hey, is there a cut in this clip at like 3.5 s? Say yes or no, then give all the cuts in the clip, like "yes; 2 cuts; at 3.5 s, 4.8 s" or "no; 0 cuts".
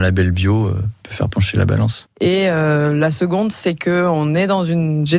no; 1 cut; at 2.1 s